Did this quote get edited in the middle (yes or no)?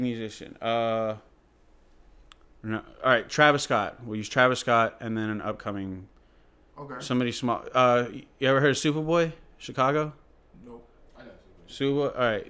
no